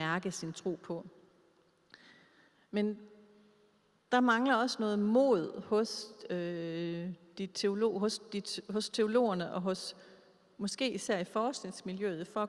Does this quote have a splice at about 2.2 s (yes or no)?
no